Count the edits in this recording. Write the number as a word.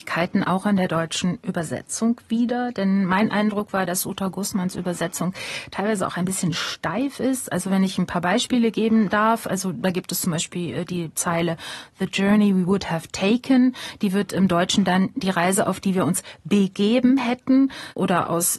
zero